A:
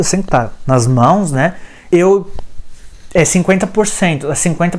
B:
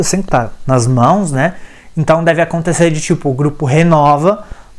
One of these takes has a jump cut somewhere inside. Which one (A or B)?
A